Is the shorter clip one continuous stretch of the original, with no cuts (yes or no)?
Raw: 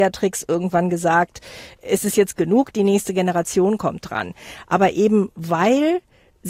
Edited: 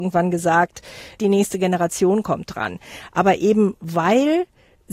no